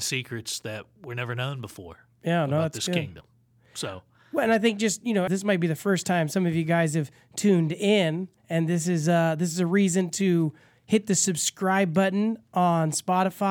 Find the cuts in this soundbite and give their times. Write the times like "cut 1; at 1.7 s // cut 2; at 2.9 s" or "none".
cut 1; at 5.3 s // cut 2; at 8.4 s

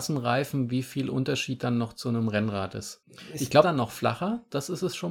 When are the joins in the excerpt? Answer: cut 1; at 3.6 s

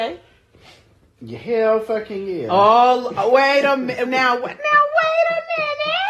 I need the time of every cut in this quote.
cut 1; at 4.1 s

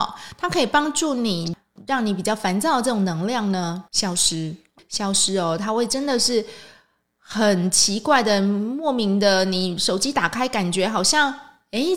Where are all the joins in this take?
none

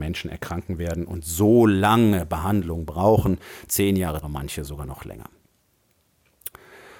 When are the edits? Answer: cut 1; at 4.2 s

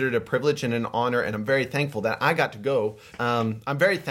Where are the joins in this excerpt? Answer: cut 1; at 3.1 s

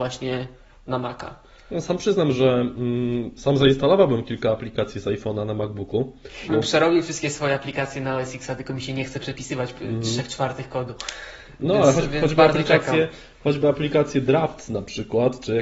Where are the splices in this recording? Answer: cut 1; at 6.5 s

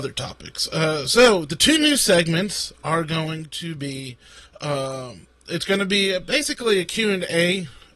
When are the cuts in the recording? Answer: none

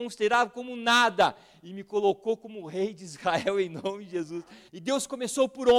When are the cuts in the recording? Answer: cut 1; at 4.7 s

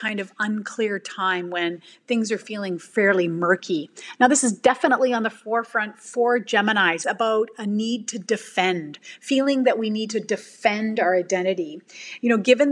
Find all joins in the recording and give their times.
cut 1; at 7.0 s

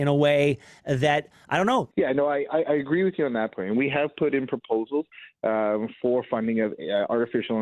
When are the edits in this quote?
cut 1; at 1.9 s

